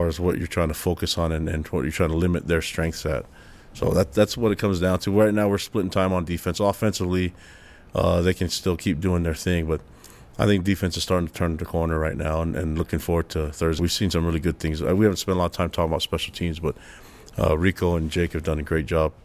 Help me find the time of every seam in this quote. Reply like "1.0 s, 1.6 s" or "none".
13.8 s